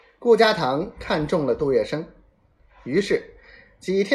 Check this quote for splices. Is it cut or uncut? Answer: uncut